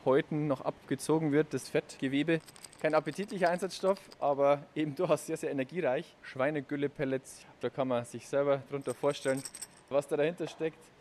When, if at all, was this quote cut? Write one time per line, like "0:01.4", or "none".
0:06.2